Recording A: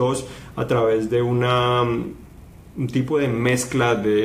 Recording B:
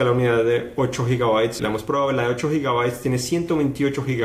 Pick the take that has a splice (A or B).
B